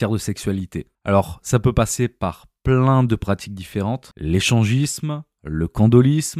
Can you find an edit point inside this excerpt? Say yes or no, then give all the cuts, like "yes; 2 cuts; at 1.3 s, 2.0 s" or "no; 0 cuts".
no; 0 cuts